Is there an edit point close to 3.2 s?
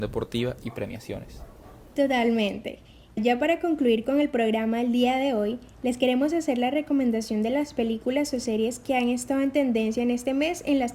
yes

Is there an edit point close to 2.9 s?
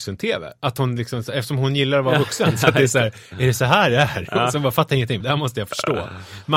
no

